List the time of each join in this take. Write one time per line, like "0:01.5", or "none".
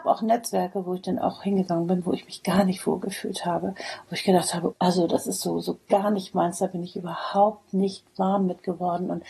0:04.7